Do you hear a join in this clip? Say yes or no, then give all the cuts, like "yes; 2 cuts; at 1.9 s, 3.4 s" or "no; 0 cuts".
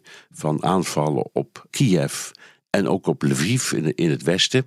yes; 1 cut; at 1.7 s